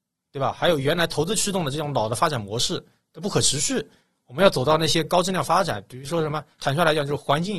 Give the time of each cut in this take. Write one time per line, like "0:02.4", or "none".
none